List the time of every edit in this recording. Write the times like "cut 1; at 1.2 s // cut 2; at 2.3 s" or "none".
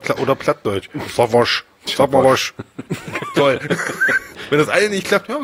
cut 1; at 2.9 s